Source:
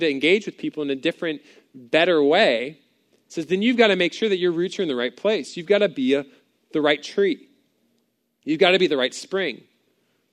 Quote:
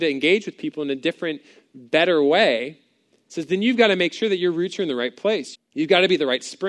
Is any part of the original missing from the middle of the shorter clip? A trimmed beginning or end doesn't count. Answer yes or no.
yes